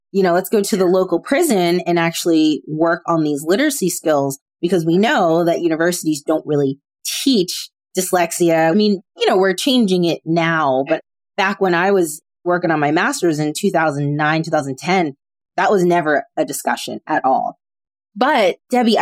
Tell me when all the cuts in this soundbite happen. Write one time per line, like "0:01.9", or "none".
0:08.7